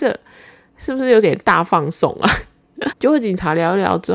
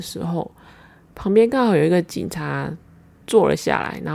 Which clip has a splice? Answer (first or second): first